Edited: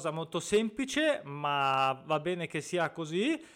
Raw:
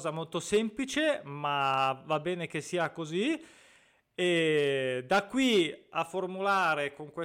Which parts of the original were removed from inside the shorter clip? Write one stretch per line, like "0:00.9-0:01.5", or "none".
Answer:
none